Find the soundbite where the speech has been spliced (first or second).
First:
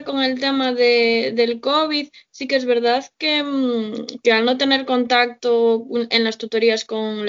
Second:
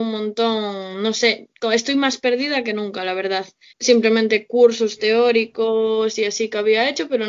second